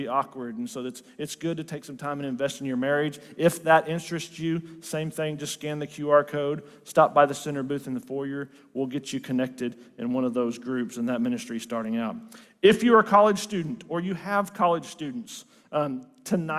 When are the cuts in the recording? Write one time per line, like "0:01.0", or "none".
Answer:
none